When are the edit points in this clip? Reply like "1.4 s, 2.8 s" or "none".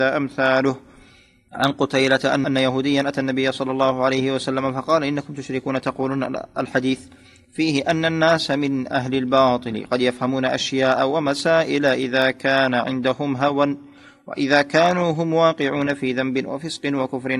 none